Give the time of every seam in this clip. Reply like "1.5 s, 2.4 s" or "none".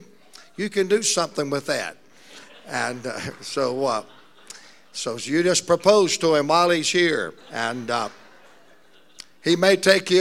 7.4 s